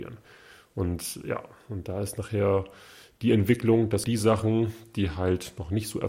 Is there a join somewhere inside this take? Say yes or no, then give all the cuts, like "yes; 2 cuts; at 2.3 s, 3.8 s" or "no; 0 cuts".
yes; 1 cut; at 4.0 s